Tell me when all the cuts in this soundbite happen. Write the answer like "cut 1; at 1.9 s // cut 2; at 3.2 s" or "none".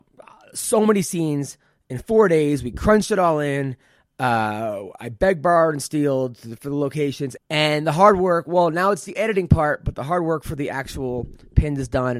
cut 1; at 7.4 s